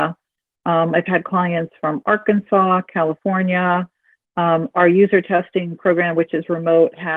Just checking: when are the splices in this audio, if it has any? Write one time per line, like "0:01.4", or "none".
none